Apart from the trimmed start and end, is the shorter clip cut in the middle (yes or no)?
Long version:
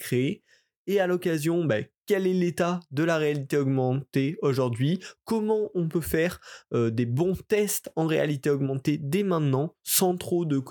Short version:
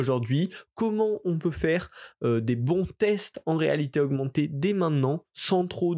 no